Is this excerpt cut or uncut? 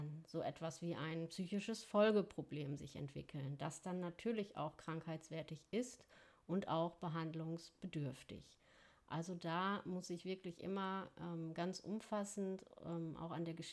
uncut